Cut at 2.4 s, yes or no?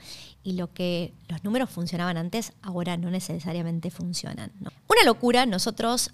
no